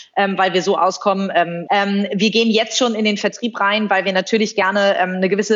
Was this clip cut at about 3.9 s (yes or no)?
no